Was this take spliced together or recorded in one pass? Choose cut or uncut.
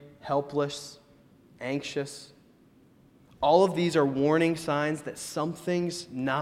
uncut